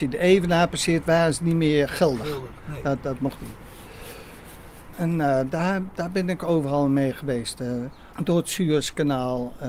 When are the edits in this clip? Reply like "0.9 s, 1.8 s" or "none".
3.0 s, 4.9 s, 8.1 s